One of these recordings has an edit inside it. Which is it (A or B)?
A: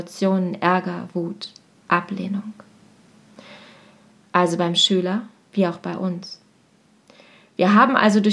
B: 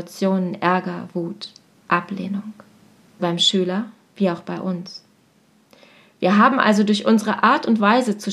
B